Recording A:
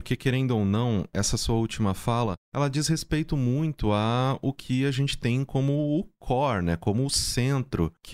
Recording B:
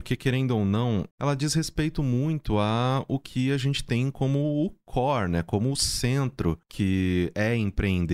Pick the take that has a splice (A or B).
B